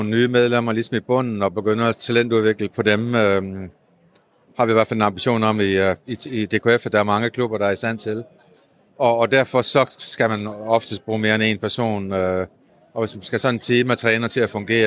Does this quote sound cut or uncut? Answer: uncut